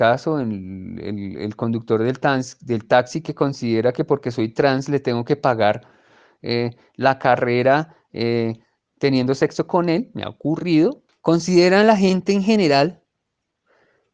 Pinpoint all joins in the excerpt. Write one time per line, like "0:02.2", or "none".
none